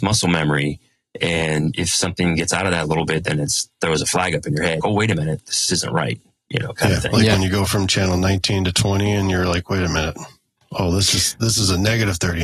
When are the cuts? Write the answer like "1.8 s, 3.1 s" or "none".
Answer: 4.8 s